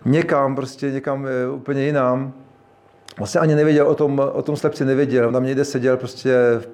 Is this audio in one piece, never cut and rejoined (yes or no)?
yes